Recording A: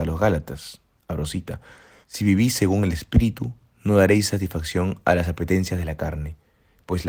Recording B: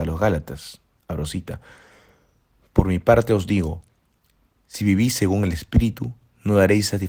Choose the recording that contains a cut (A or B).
A